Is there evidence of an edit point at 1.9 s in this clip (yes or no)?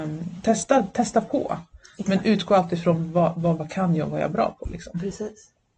no